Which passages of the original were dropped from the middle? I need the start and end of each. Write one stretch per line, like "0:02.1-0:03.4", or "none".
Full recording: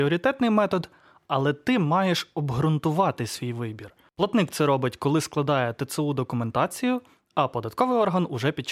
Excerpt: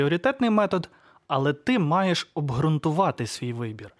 none